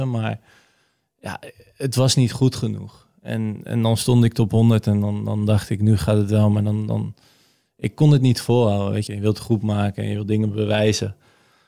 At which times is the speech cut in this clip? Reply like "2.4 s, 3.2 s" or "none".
9.1 s